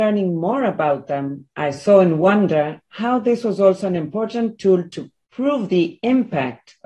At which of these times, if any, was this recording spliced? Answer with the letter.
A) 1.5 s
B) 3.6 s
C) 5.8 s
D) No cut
D